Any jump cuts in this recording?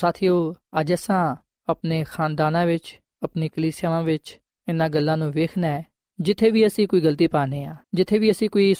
yes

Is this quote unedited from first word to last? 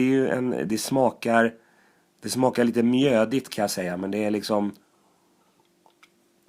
yes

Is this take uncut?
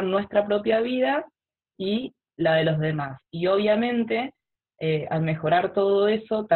yes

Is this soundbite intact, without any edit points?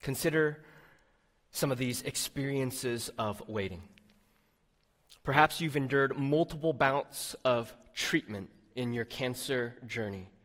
yes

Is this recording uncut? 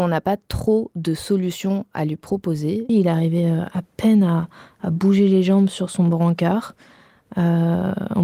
no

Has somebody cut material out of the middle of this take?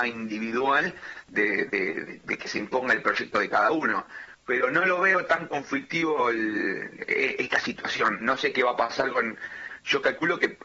no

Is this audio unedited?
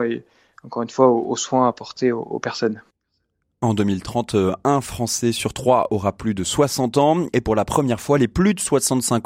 yes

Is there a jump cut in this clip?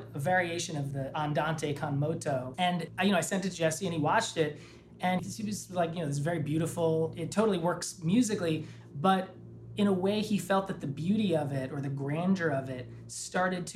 yes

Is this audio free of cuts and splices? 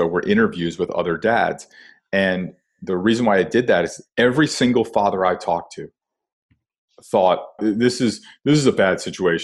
no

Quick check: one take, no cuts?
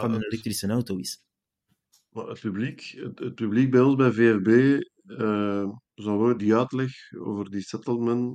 no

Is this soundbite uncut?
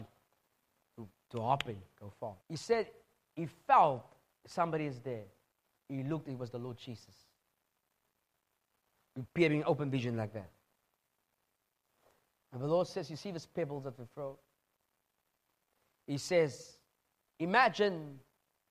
no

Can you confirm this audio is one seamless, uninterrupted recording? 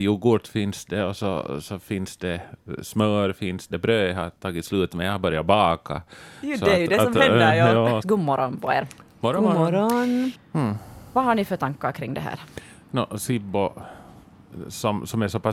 no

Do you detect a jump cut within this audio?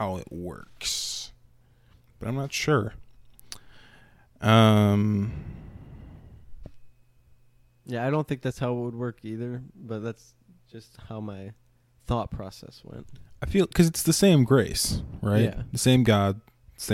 no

